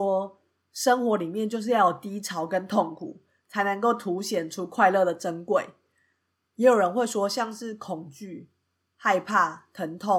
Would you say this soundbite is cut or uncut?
uncut